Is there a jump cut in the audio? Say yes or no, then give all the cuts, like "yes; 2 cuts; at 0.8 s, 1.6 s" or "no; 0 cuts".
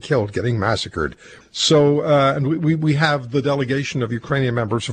yes; 1 cut; at 1.4 s